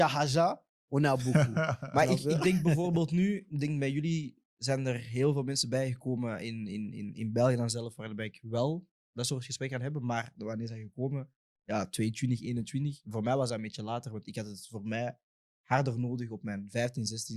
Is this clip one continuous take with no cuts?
yes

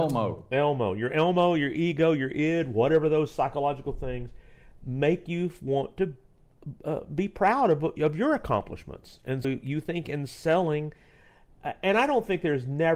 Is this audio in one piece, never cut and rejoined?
no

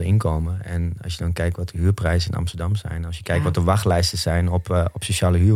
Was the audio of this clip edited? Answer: no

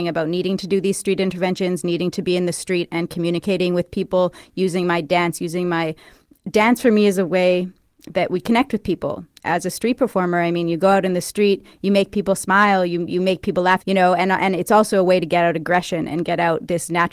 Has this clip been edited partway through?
yes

